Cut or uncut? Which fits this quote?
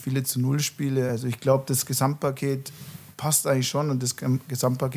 uncut